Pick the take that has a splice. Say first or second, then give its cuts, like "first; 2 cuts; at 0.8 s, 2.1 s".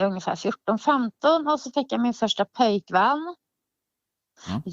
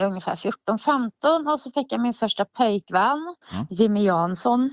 second; 1 cut; at 3.4 s